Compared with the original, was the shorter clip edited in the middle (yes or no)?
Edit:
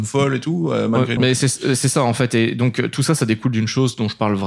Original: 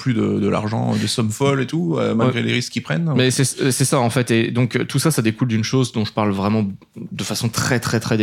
yes